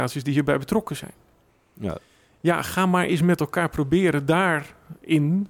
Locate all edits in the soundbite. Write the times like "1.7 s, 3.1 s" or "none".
none